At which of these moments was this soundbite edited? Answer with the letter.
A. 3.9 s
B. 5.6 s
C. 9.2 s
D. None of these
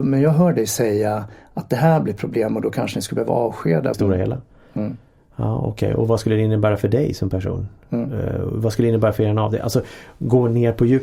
A